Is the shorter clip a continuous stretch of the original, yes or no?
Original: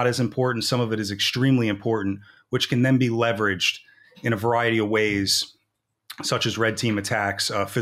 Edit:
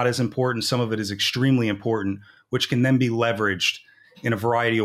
yes